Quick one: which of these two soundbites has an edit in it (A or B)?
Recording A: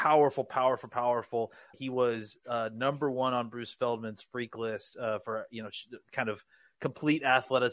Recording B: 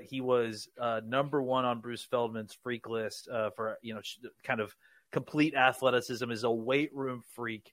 A